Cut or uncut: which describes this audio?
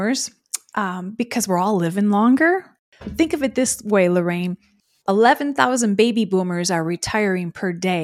uncut